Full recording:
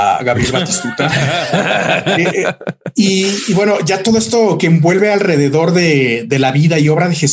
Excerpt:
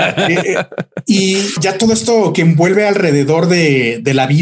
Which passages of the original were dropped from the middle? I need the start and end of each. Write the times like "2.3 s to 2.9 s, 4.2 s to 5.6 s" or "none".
3.5 s to 3.8 s